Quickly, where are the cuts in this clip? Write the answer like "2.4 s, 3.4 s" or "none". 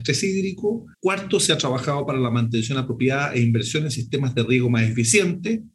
0.9 s